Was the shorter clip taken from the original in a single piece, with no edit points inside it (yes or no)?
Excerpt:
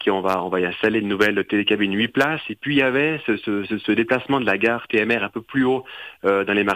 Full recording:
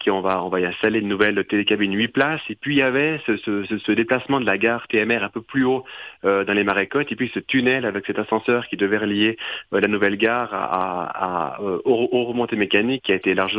yes